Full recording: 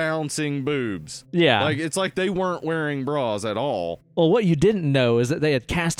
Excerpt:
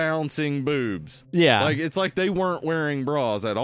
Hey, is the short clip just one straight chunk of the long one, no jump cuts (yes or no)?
yes